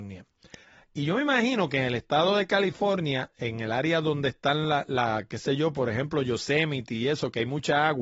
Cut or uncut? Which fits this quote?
uncut